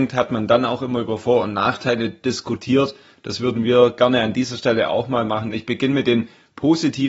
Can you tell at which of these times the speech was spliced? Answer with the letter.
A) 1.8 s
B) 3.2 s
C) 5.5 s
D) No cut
D